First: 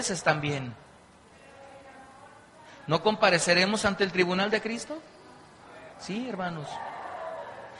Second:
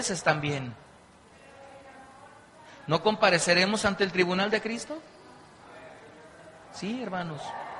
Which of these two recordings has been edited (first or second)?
first